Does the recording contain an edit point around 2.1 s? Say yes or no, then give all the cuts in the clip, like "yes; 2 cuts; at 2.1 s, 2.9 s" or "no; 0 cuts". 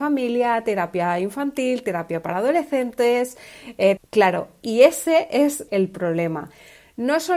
no; 2 cuts; at 4.0 s, 5.7 s